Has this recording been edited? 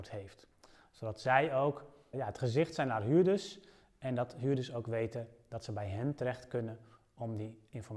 yes; 1 cut; at 2.1 s

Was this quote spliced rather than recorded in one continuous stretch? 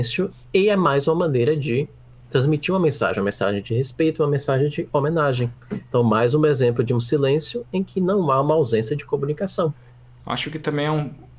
no; 0 cuts

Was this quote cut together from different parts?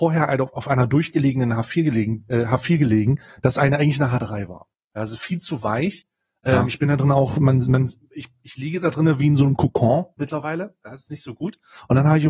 no; 0 cuts

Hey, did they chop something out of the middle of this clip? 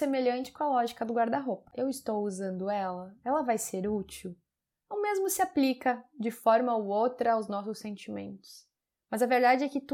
yes; 1 cut; at 1.7 s

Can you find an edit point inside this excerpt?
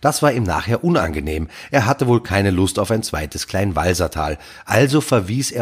no; 0 cuts

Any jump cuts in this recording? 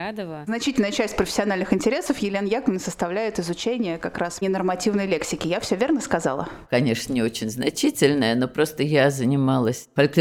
no; 0 cuts

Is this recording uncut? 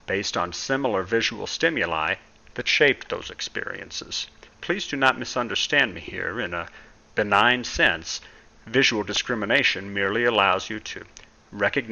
no; 1 cut; at 4.5 s

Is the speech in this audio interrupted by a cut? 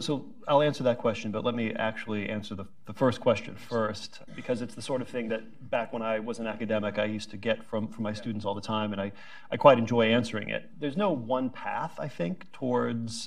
yes; 1 cut; at 4.3 s

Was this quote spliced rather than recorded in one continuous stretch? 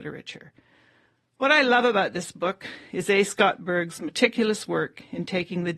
no; 0 cuts

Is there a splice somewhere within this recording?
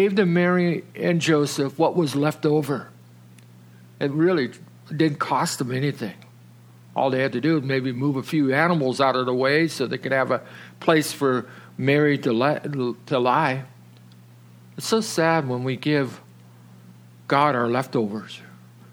no; 0 cuts

